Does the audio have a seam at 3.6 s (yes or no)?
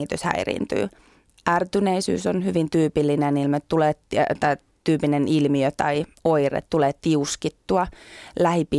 no